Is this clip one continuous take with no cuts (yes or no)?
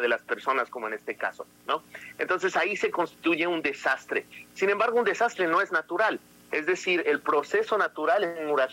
yes